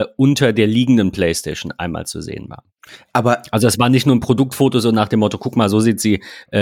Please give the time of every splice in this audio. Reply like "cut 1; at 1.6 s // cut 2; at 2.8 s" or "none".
none